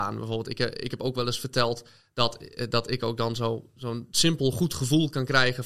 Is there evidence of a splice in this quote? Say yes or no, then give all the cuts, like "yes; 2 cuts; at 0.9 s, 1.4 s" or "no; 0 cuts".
no; 0 cuts